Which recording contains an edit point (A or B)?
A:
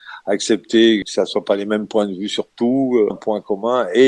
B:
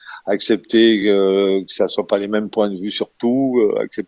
A